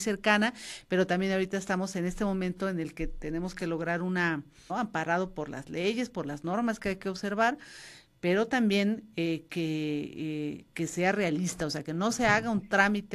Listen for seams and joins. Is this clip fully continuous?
no; 1 cut; at 4.7 s

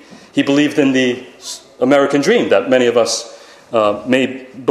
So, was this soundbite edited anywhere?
no; 0 cuts

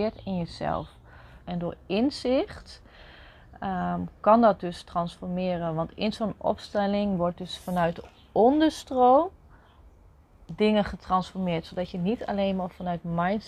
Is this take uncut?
no; 1 cut; at 1.4 s

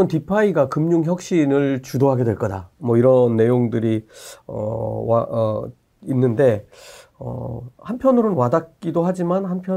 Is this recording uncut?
yes; 0 cuts

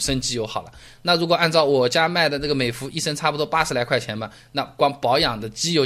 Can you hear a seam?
no; 0 cuts

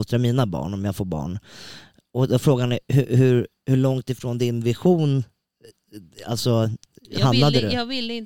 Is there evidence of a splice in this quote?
no; 0 cuts

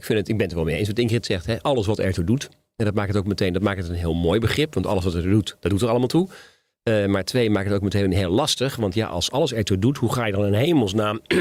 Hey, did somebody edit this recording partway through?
no; 0 cuts

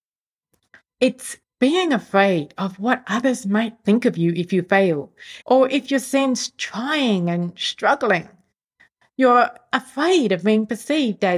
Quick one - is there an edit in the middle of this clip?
yes; 1 cut; at 5.4 s

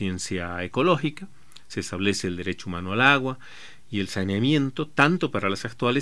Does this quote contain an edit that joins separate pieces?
no; 0 cuts

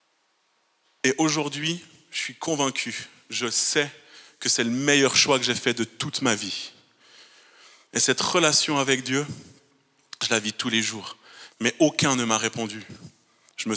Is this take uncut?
no; 1 cut; at 11.5 s

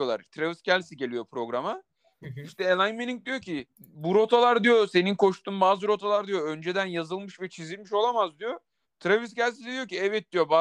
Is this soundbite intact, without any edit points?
no; 2 cuts; at 3.7 s, 8.8 s

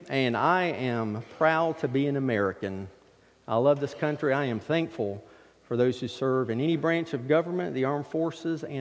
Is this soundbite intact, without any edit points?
yes; 0 cuts

